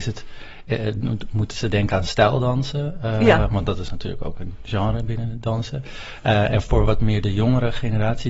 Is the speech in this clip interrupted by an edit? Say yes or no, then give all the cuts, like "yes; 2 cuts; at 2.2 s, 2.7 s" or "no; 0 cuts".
no; 0 cuts